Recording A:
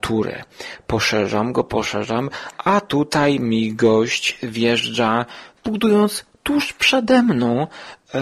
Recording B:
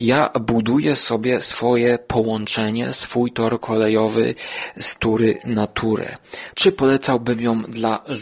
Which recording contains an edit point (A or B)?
B